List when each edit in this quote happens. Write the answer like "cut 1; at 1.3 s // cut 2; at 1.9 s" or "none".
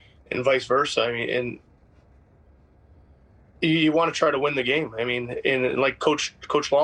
none